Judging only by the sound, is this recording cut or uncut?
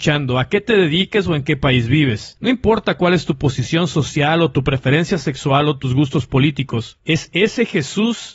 cut